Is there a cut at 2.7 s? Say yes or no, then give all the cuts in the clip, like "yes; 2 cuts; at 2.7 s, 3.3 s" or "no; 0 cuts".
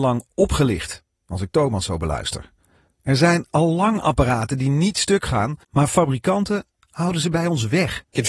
no; 1 cut; at 5.6 s